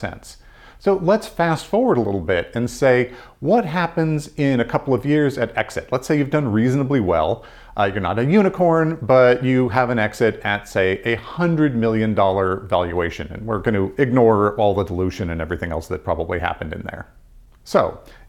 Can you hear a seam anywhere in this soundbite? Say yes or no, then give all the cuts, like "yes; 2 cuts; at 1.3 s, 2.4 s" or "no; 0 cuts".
no; 0 cuts